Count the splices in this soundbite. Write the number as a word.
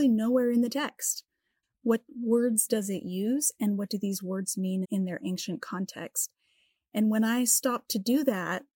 two